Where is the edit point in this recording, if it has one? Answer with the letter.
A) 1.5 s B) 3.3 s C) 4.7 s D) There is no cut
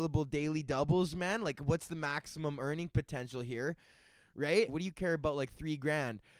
C